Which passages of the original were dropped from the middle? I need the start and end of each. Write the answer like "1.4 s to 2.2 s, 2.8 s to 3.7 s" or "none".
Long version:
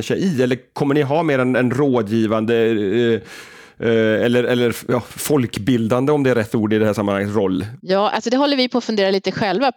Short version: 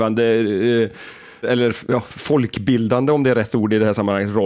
3.7 s to 4.4 s

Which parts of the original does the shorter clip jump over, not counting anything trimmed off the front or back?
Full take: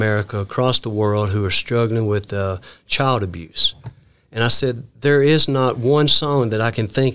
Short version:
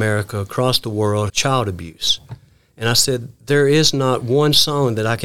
1.3 s to 2.8 s

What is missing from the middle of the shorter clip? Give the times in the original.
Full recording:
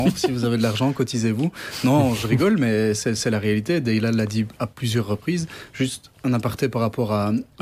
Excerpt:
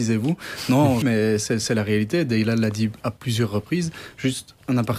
2.2 s to 2.6 s

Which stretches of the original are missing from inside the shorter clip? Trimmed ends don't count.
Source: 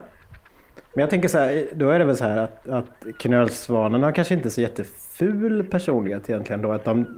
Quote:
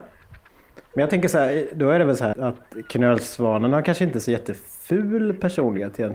2.3 s to 2.6 s

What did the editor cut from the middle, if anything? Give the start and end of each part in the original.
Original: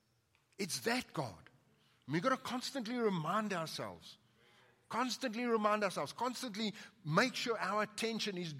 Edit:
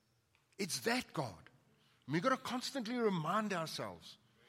none

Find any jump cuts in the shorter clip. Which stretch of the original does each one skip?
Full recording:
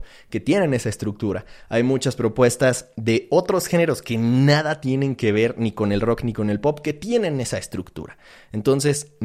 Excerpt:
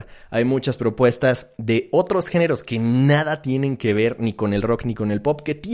none

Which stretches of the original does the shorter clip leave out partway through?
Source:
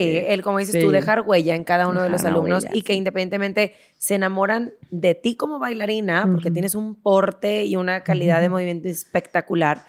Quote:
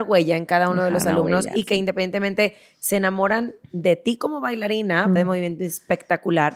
6.3 s to 8.4 s

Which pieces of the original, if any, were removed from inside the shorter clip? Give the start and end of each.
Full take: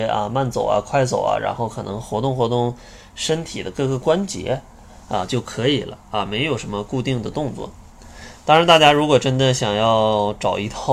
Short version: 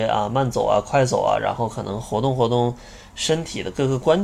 none

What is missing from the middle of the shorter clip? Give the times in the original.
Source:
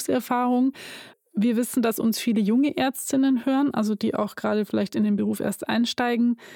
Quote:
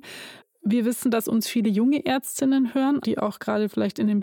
3.7 s to 4.0 s

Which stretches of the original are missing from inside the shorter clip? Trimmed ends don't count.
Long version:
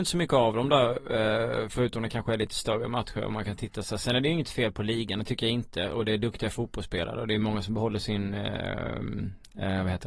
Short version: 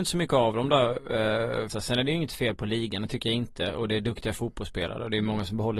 1.7 s to 3.9 s

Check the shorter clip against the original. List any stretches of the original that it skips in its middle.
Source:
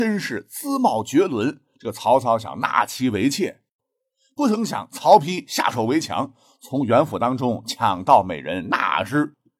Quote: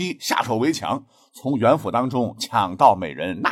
none

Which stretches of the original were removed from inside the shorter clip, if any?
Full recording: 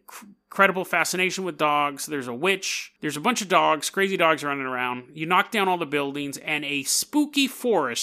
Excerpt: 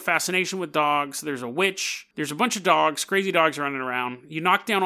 none

